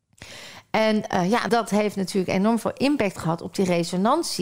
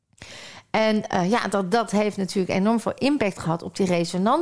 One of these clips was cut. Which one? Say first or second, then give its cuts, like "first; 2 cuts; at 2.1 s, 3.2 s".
first; 1 cut; at 1.5 s